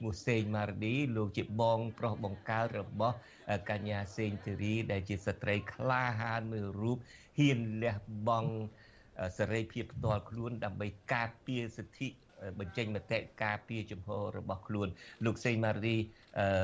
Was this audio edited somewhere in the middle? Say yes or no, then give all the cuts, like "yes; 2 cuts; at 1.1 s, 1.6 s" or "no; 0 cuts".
no; 0 cuts